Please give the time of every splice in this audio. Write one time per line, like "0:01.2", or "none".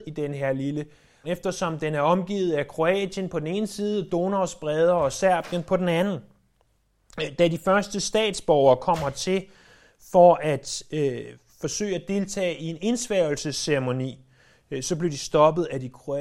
0:01.2